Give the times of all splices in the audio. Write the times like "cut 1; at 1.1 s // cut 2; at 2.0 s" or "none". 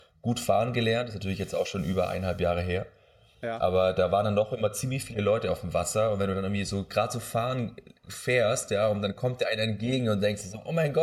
none